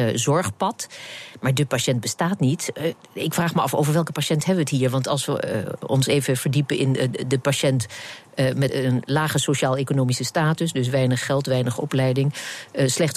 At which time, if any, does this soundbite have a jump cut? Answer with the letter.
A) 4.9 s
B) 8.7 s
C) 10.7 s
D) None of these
B